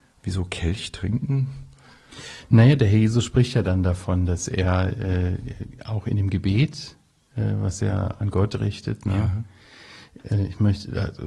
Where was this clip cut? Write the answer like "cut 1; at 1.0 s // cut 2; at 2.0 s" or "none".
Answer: none